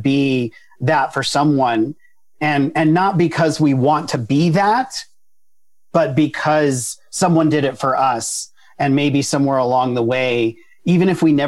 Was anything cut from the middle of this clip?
no; 0 cuts

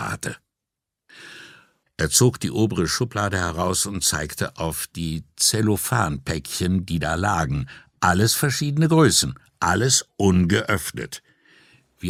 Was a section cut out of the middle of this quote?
yes; 1 cut; at 1.8 s

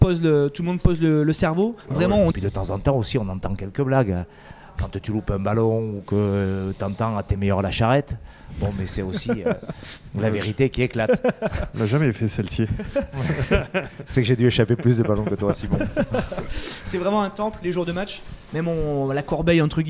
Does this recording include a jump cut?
yes; 1 cut; at 2.3 s

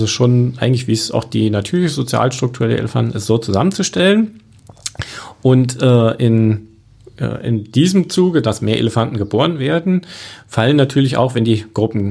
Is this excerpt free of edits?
yes; 0 cuts

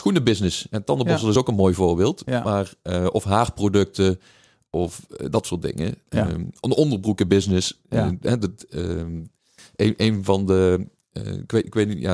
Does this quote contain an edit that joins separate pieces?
no; 0 cuts

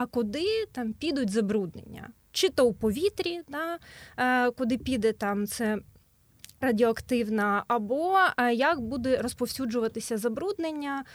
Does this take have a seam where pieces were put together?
yes; 1 cut; at 6.6 s

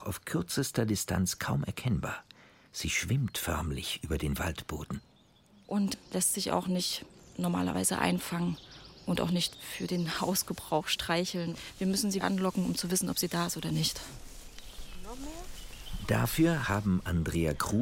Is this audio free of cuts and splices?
yes; 0 cuts

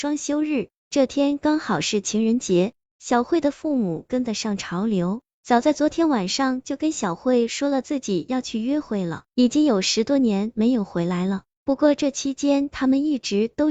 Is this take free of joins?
no; 1 cut; at 9.3 s

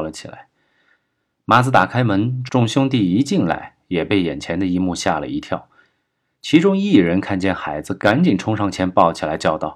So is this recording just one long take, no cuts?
yes; 0 cuts

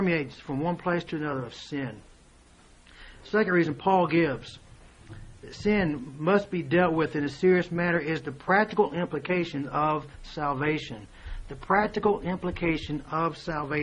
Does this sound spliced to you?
no; 0 cuts

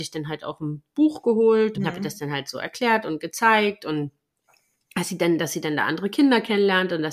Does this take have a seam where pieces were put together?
yes; 1 cut; at 1.7 s

